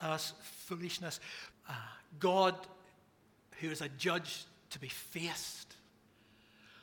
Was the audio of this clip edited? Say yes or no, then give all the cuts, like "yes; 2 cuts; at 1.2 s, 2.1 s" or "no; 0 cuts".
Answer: yes; 1 cut; at 1.5 s